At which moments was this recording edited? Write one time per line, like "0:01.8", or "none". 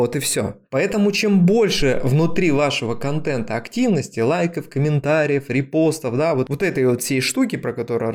none